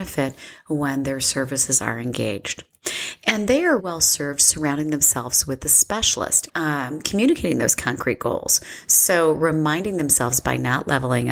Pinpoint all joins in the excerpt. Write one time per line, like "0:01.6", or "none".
0:03.8
0:06.5